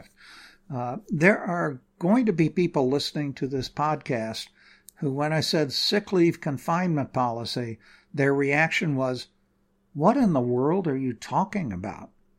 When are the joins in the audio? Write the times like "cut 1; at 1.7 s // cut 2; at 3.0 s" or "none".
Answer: none